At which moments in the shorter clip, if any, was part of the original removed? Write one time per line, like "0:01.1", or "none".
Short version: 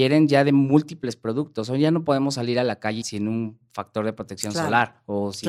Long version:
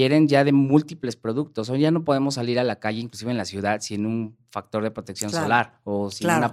0:03.0